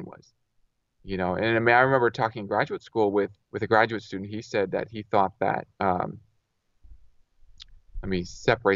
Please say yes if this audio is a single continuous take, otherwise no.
no